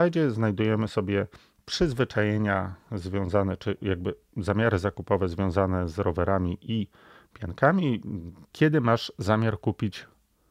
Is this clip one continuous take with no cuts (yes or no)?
no